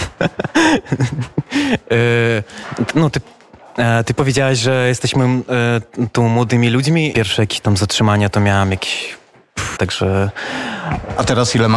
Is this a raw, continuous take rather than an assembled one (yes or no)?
no